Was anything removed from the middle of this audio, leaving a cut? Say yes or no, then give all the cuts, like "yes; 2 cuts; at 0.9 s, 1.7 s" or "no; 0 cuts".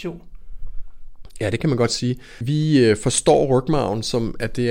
no; 0 cuts